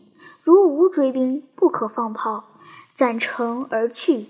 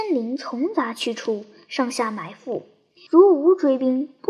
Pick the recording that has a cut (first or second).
second